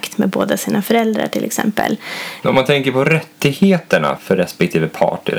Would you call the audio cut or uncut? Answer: cut